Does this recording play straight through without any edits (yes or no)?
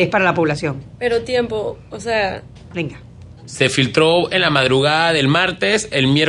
no